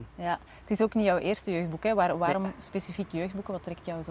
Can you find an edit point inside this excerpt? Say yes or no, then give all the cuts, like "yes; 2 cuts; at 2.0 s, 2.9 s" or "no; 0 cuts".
no; 0 cuts